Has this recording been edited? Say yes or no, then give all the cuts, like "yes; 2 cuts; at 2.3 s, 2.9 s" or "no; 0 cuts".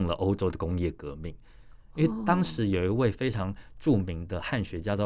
no; 0 cuts